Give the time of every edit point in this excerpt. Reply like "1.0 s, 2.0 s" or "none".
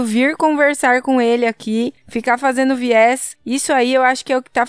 none